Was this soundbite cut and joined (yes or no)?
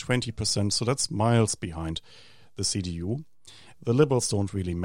yes